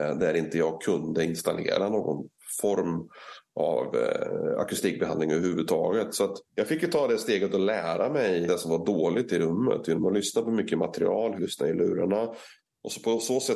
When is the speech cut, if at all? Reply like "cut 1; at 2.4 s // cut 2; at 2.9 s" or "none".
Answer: cut 1; at 6.5 s // cut 2; at 8.5 s // cut 3; at 11.4 s